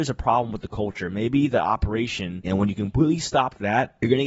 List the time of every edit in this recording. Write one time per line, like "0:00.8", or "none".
0:02.4